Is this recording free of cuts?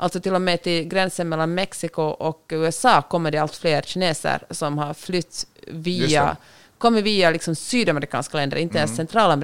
yes; 0 cuts

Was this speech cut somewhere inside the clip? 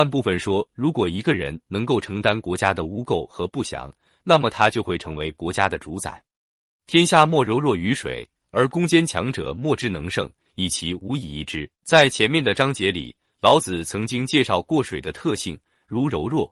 yes; 1 cut; at 11.7 s

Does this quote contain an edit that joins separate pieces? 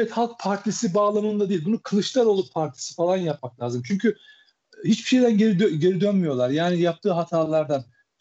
no; 0 cuts

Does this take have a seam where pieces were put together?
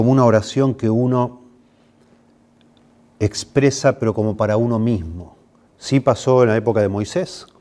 yes; 1 cut; at 5.7 s

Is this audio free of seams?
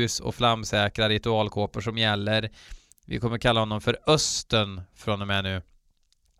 no; 1 cut; at 2.9 s

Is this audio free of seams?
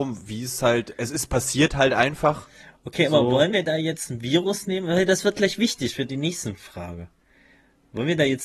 yes; 0 cuts

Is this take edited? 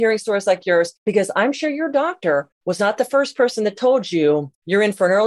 no; 0 cuts

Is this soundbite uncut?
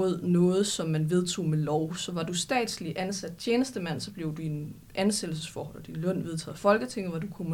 yes; 0 cuts

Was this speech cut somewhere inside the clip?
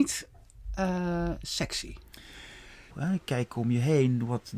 yes; 1 cut; at 2.9 s

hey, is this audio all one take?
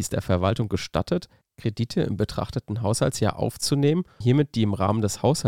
no; 1 cut; at 4.2 s

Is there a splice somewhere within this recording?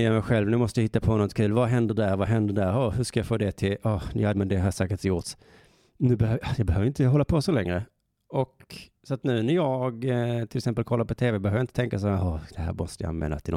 yes; 1 cut; at 4.3 s

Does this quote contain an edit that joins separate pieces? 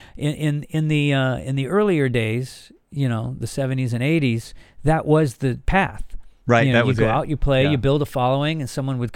no; 0 cuts

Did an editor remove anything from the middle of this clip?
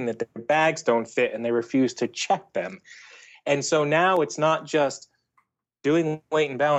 no; 0 cuts

